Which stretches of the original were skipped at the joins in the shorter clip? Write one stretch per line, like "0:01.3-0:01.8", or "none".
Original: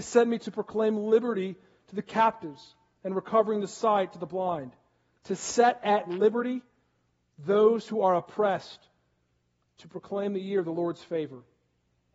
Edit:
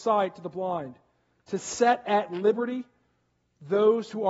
none